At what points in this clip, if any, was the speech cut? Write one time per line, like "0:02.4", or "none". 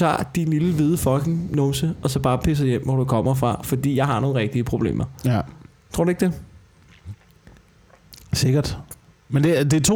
none